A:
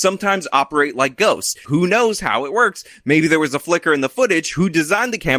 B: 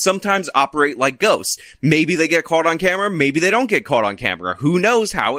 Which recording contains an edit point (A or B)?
A